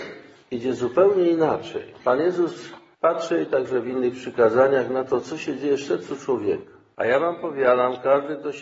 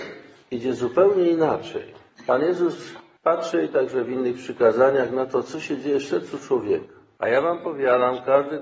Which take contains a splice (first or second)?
first